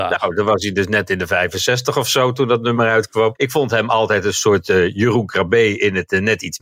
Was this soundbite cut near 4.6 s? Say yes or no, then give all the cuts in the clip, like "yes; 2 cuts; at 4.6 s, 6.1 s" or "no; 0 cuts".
no; 1 cut; at 3.4 s